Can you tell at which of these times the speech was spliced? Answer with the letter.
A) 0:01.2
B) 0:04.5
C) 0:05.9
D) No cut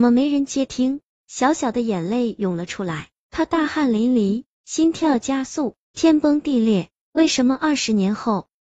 C